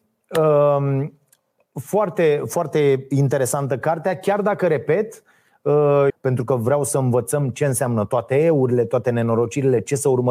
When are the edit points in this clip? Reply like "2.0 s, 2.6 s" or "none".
6.1 s